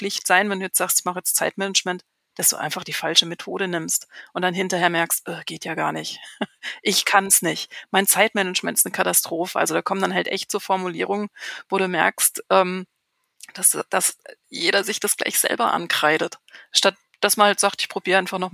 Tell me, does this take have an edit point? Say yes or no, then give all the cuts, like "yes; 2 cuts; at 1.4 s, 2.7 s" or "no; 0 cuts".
no; 0 cuts